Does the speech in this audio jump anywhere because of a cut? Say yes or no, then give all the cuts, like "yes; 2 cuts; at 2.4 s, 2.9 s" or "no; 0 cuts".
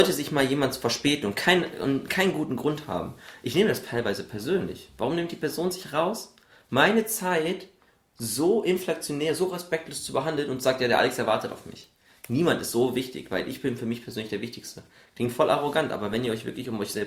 no; 0 cuts